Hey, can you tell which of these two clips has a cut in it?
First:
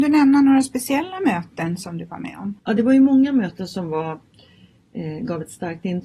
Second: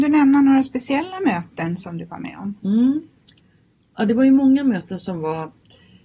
first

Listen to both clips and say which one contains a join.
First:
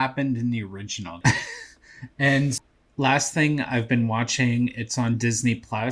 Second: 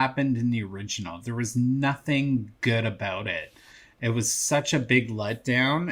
first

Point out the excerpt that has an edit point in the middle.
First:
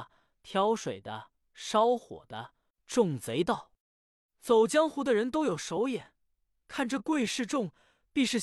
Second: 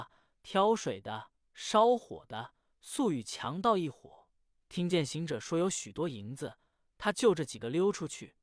first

